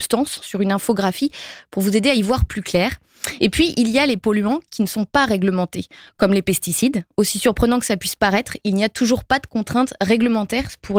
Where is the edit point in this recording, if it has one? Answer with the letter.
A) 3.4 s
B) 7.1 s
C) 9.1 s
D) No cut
D